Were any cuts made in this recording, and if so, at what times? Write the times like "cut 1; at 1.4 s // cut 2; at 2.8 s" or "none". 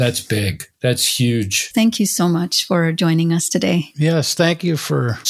cut 1; at 1.7 s